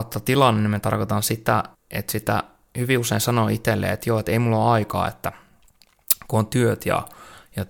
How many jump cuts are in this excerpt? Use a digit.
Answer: 1